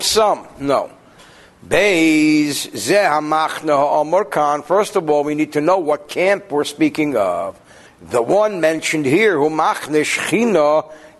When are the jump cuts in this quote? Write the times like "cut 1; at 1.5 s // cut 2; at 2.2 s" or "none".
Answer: cut 1; at 7.9 s